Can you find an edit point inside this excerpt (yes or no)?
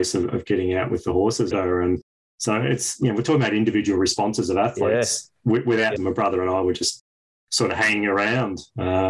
yes